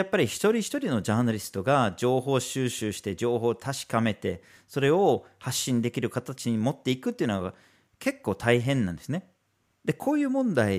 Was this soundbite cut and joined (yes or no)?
yes